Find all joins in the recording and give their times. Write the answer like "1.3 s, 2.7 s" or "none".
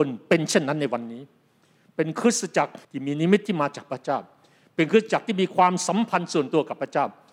2.8 s